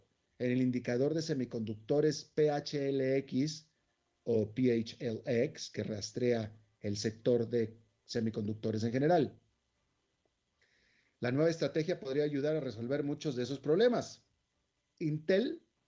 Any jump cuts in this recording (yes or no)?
no